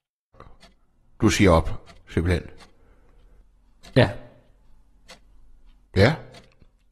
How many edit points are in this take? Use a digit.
1